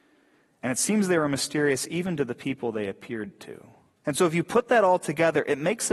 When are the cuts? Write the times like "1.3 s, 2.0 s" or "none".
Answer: 4.0 s